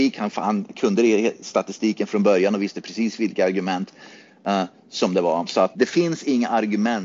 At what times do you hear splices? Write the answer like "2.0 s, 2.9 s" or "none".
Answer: 5.7 s